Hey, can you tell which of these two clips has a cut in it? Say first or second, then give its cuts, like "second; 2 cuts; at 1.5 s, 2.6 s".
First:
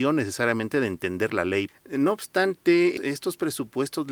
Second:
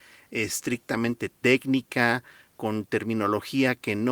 first; 2 cuts; at 1.7 s, 3.0 s